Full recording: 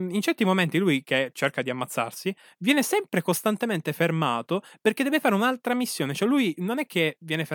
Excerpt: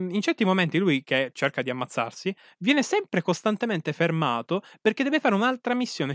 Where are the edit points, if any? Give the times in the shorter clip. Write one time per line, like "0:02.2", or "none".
none